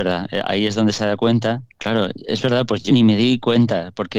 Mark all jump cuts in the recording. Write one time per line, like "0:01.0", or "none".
0:01.8
0:02.9